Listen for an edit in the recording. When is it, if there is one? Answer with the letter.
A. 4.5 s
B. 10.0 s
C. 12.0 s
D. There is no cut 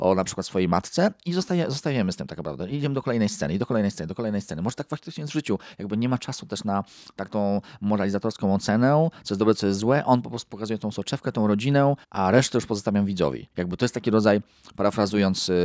C